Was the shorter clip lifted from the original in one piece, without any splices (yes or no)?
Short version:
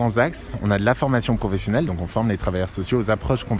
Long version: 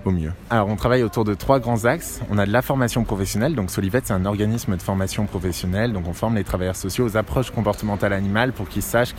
no